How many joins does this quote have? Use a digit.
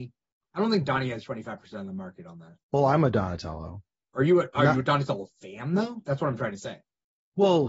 1